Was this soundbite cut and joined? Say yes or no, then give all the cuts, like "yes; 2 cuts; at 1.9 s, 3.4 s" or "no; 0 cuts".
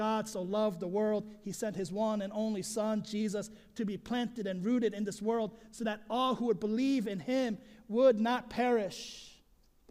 no; 0 cuts